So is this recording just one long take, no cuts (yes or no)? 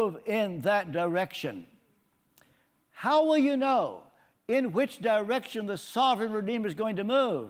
yes